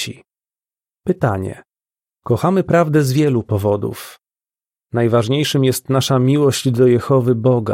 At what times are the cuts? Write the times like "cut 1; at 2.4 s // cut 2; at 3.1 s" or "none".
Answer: cut 1; at 2.1 s